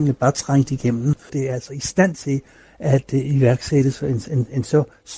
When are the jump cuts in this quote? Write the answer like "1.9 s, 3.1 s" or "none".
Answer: 1.3 s